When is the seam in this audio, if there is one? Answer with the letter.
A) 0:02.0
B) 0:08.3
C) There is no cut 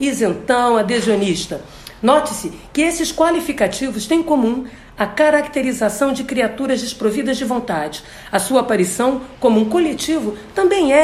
C